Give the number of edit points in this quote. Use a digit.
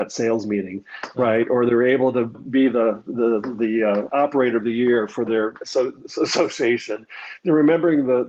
1